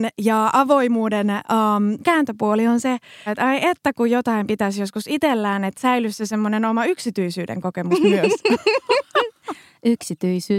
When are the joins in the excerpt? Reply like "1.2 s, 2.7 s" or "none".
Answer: 3.3 s